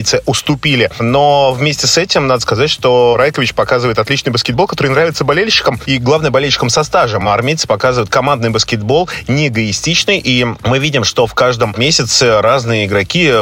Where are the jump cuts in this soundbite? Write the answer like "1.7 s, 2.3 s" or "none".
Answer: none